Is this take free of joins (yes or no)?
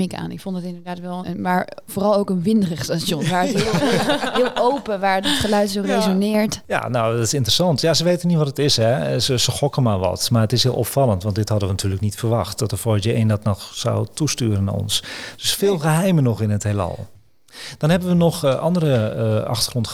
no